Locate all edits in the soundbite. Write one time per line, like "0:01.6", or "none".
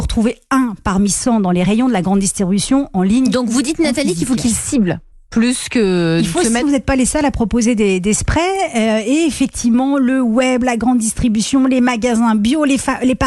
0:06.6